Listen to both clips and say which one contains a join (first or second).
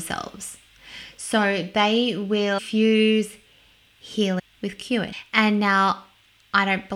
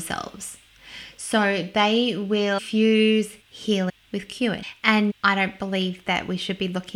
second